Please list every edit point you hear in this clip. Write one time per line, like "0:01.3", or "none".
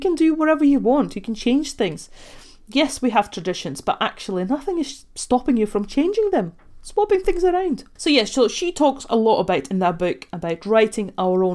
0:08.0